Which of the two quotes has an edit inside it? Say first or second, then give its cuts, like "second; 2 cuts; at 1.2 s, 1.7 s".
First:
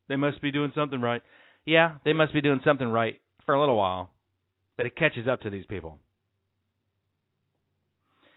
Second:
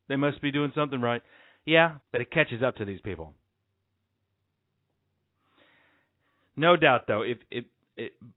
second; 1 cut; at 2.0 s